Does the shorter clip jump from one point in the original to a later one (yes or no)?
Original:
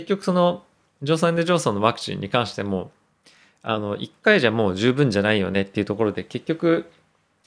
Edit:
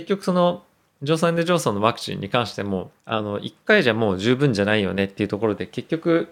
yes